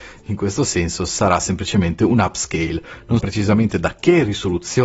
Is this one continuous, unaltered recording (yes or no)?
no